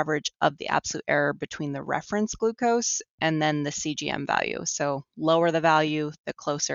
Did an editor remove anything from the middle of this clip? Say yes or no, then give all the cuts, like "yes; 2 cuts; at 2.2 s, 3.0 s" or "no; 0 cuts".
no; 0 cuts